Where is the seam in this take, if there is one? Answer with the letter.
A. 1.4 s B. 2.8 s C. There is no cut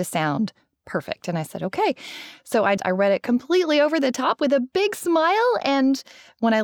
B